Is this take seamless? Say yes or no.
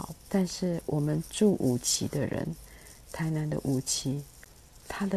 no